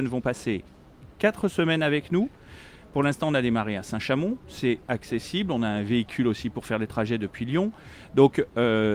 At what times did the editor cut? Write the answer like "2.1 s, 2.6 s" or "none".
none